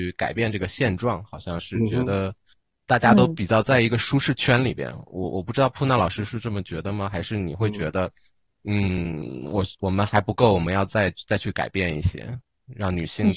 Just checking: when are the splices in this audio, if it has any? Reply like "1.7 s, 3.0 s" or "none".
none